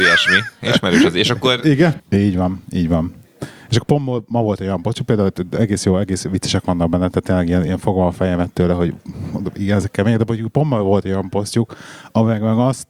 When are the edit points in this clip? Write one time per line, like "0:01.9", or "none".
0:02.0

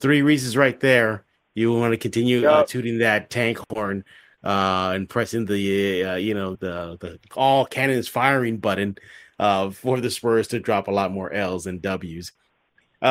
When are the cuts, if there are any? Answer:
0:06.5

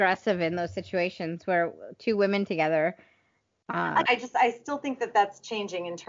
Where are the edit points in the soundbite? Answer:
0:04.1

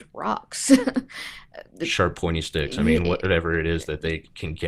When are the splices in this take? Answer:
none

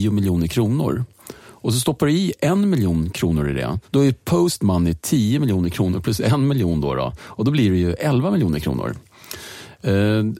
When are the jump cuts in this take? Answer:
0:03.8

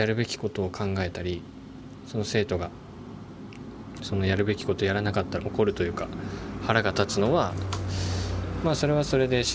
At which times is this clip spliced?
0:05.4

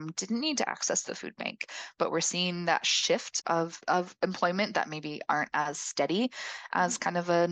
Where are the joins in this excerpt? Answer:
0:03.4

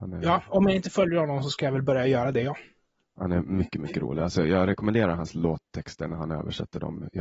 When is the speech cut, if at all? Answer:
none

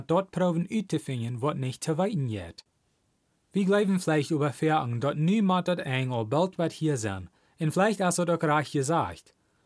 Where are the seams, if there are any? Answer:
0:03.3

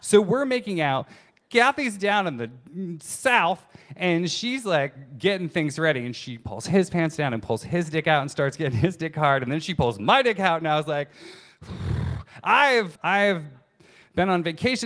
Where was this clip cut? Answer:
0:12.9

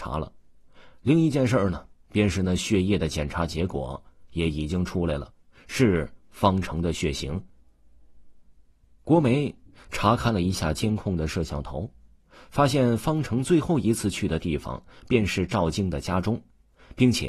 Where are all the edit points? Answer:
0:08.8

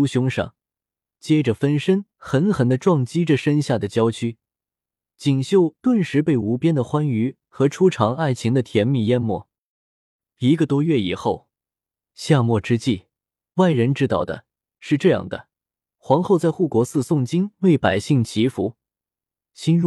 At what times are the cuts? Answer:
none

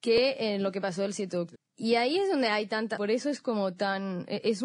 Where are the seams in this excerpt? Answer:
0:01.5
0:03.0

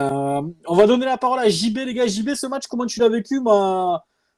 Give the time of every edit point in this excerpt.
none

